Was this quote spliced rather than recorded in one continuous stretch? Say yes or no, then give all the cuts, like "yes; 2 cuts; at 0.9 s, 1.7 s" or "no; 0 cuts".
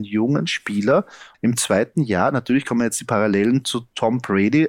yes; 1 cut; at 1.3 s